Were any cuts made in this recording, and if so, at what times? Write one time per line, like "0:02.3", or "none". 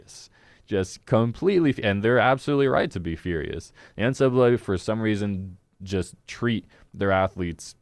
none